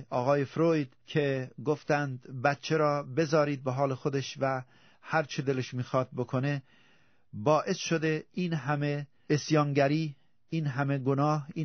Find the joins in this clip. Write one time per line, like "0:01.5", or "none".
none